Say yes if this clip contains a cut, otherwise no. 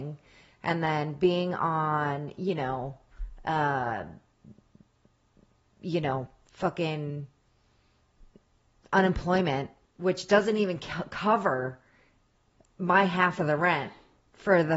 no